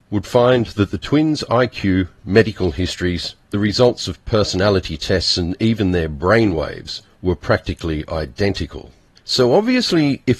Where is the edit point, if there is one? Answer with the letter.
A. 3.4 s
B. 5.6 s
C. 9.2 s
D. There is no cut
C